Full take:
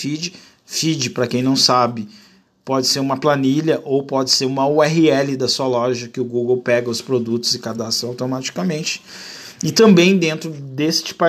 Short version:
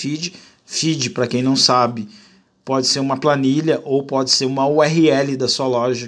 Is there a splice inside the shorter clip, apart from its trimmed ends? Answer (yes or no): no